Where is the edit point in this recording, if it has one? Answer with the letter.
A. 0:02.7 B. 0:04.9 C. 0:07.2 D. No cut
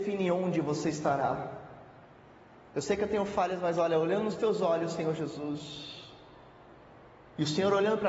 A